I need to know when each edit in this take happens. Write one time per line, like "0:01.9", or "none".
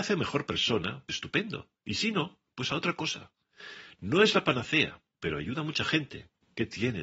0:01.1